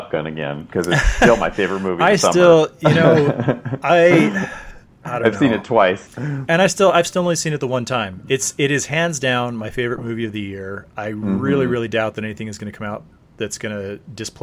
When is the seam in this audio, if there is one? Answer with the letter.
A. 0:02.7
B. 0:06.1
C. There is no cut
B